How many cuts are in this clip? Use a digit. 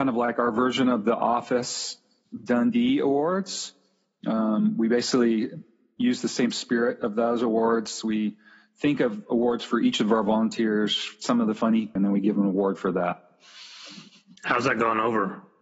1